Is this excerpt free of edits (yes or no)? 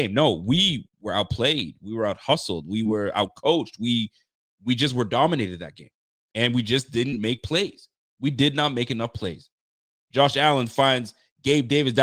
yes